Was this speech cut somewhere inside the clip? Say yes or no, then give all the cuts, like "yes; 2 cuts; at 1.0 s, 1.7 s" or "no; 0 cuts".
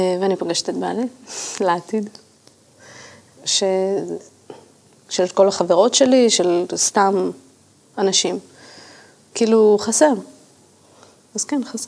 yes; 2 cuts; at 3.4 s, 9.3 s